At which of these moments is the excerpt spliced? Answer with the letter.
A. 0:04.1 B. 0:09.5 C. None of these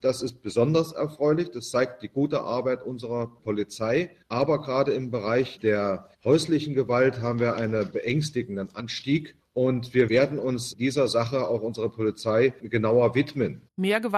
C